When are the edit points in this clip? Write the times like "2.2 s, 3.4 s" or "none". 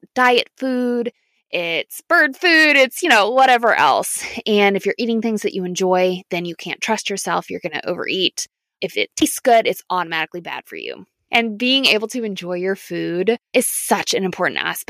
11.3 s, 13.5 s

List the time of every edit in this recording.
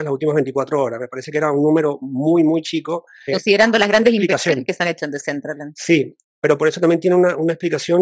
3.3 s

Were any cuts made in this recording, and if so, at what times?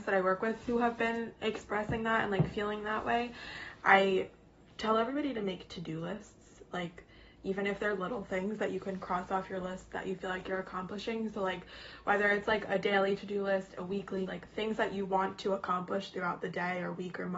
14.3 s

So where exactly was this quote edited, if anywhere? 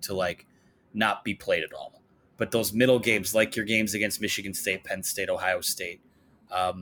none

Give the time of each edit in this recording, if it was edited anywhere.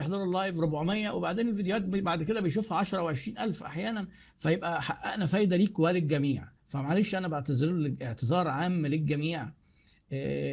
6.6 s

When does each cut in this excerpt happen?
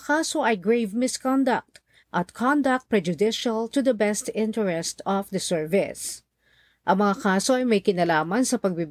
2.0 s

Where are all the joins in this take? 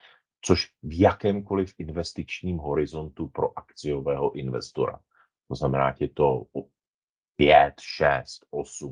none

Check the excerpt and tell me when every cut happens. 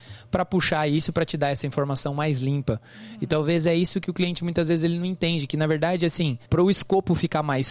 6.4 s

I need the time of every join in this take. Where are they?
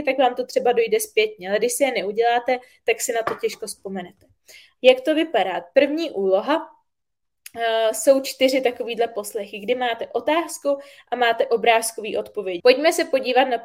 12.6 s

